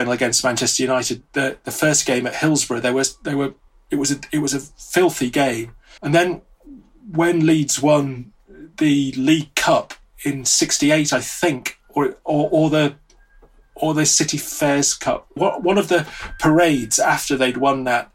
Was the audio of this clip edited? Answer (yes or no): yes